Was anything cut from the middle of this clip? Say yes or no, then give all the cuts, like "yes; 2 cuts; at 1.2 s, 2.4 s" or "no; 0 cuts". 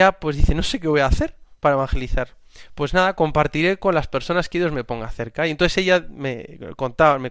no; 0 cuts